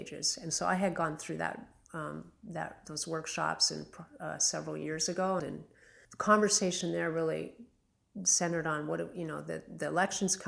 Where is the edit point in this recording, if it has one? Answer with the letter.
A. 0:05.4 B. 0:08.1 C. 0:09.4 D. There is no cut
A